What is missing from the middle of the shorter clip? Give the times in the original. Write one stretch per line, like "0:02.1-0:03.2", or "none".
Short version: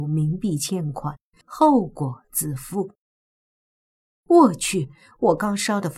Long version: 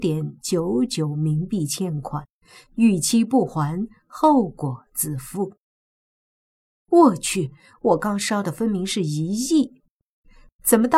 0:02.5-0:04.0

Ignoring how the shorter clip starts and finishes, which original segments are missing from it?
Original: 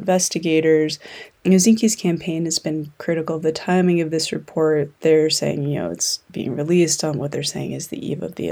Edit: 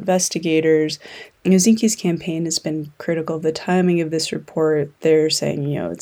none

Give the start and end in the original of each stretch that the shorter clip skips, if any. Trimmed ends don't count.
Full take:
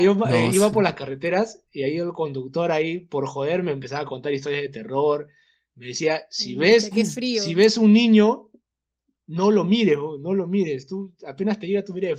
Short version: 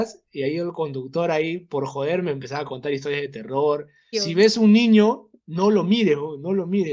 0:05.5-0:07.3
0:08.6-0:09.2

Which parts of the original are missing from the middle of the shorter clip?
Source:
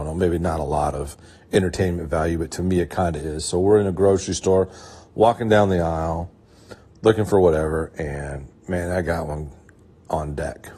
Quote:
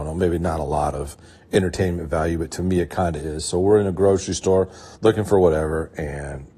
0:05.0-0:07.0

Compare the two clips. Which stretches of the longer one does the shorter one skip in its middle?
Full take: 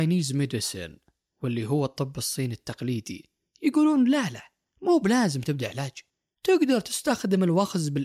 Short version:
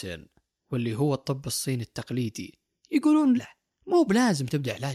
0:04.1-0:04.3

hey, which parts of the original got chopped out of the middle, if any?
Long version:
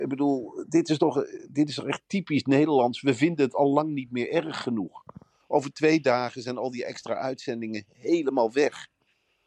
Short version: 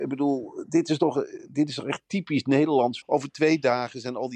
0:03.0-0:05.4

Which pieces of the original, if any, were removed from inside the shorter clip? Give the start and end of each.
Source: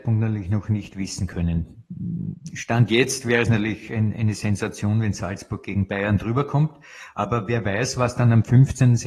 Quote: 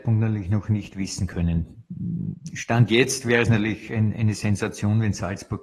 none

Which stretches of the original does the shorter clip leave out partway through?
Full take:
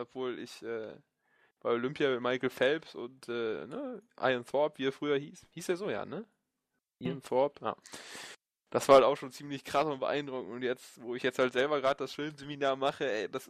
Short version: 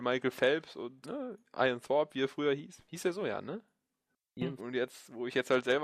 0:03.2-0:03.7
0:07.2-0:10.5

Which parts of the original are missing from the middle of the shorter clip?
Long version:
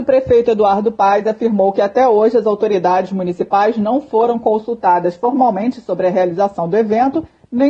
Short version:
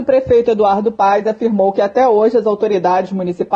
none

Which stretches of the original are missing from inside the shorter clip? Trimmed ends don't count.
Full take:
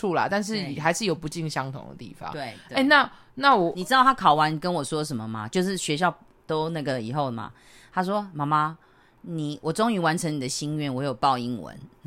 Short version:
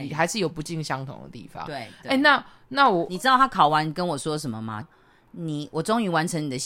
0:05.5-0:08.7

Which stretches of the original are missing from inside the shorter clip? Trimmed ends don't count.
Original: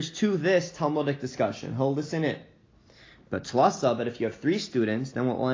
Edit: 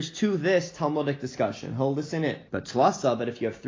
0:02.5-0:03.3

